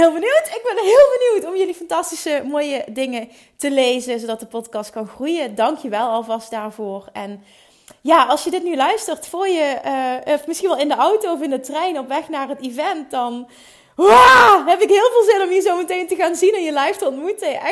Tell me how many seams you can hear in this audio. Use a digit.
0